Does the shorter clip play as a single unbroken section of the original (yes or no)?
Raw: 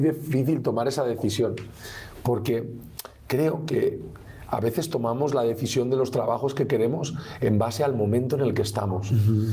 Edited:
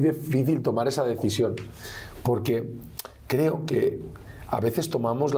yes